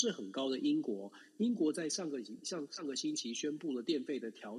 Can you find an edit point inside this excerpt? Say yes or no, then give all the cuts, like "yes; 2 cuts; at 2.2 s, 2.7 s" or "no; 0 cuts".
no; 0 cuts